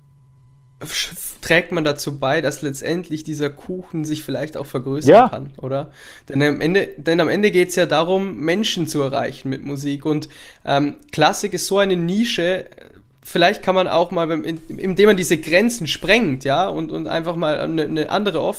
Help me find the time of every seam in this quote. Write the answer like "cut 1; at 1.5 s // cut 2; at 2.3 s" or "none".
none